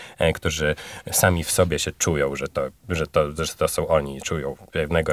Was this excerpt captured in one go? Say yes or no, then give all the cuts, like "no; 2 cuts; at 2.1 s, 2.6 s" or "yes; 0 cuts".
yes; 0 cuts